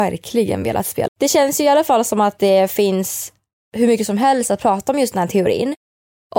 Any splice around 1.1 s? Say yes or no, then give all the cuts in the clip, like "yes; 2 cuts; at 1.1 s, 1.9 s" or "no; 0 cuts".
yes; 1 cut; at 1.1 s